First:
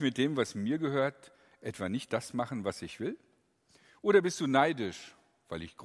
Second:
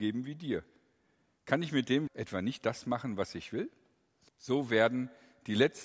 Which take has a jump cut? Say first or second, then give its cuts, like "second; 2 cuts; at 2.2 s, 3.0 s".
second; 2 cuts; at 2.1 s, 4.3 s